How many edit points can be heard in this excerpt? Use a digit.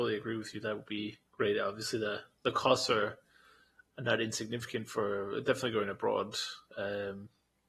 1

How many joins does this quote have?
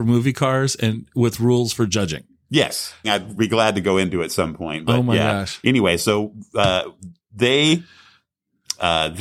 2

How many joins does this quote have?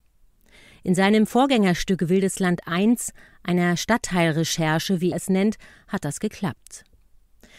1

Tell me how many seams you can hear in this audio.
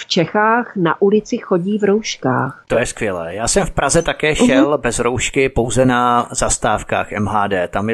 1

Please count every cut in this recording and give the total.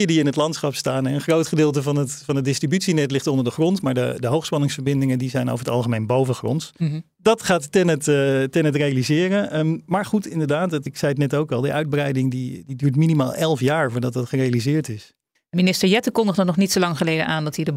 2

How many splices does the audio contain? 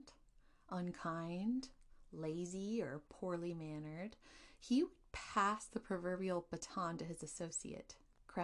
0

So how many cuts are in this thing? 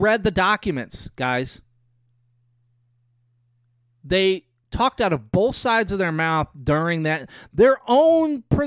0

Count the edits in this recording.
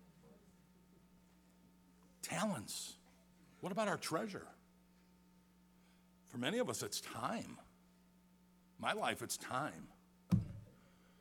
1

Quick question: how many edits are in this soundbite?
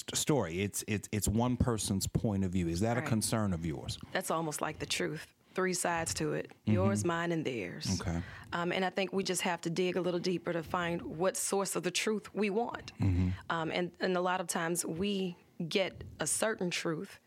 0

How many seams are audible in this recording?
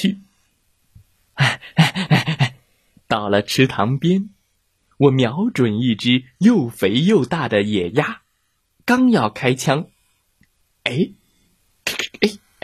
0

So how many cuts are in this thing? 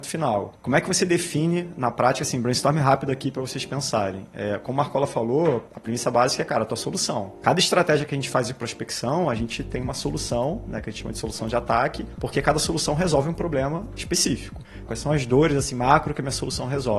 1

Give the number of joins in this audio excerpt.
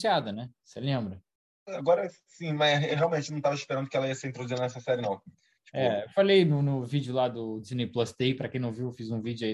1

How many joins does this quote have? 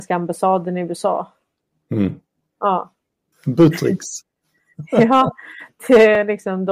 1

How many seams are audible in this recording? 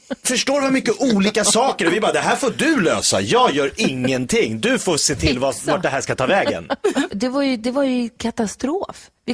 1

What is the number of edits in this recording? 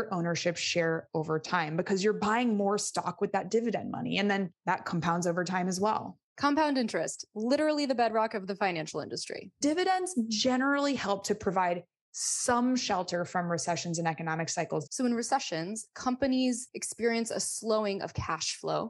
2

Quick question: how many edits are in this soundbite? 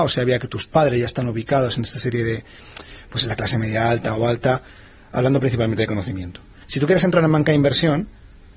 1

